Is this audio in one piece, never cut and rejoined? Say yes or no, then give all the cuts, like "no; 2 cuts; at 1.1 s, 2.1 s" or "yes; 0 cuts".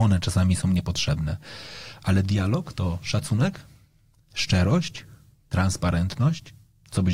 yes; 0 cuts